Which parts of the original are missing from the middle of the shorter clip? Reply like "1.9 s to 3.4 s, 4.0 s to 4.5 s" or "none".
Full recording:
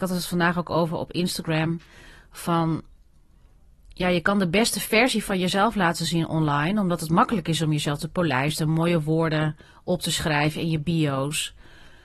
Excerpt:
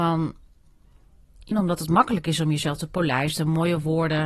4.0 s to 6.7 s